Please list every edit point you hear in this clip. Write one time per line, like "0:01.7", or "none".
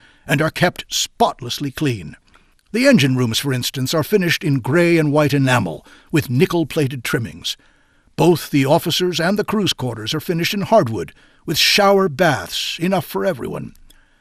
none